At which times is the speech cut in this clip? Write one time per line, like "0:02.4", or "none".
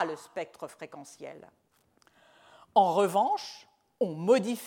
none